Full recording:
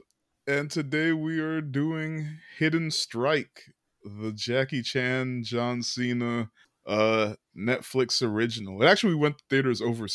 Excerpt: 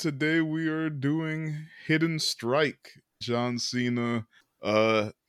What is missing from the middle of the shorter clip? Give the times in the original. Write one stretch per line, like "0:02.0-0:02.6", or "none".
0:03.9-0:05.4